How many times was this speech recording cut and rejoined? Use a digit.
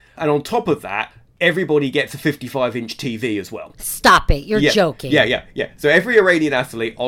0